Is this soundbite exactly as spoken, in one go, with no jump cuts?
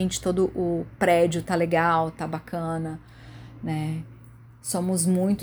yes; 0 cuts

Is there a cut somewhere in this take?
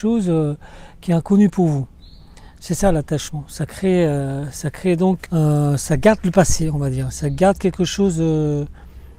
yes; 1 cut; at 5.3 s

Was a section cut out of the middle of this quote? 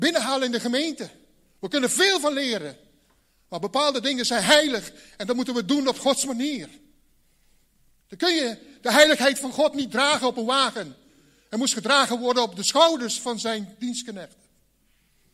no; 0 cuts

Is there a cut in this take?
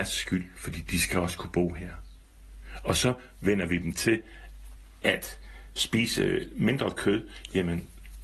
no; 0 cuts

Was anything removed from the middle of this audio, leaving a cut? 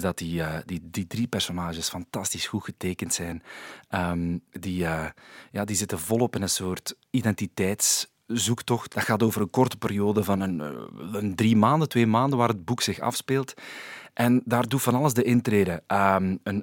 no; 0 cuts

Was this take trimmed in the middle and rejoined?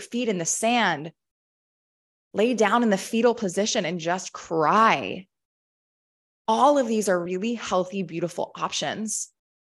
no; 0 cuts

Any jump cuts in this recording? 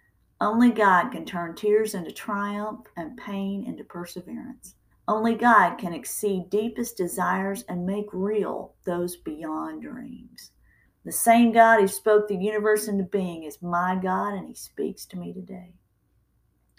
yes; 2 cuts; at 4.9 s, 10.9 s

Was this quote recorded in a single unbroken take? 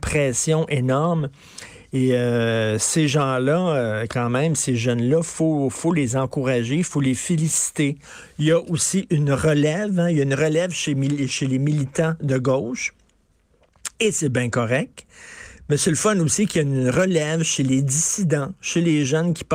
yes; 0 cuts

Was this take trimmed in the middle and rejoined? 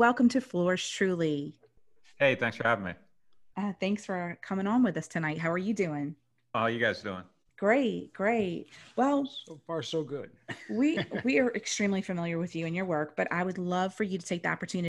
yes; 1 cut; at 6.5 s

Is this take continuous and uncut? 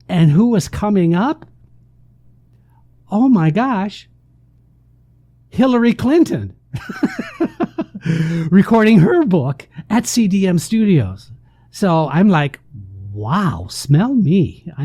yes; 0 cuts

